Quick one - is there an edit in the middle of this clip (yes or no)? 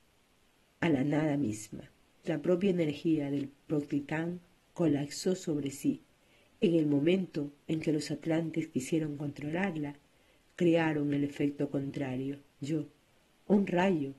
yes